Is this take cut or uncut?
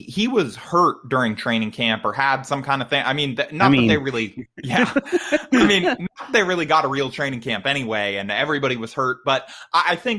uncut